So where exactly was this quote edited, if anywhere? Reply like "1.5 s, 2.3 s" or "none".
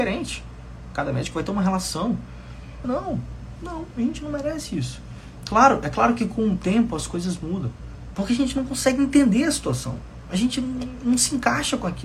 2.8 s, 5.4 s, 8.1 s